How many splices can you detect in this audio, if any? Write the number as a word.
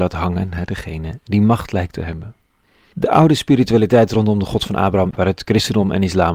two